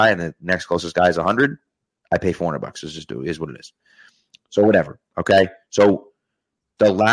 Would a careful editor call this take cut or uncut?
uncut